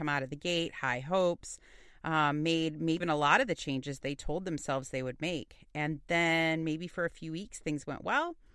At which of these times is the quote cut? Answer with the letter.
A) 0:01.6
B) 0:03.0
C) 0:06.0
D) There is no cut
B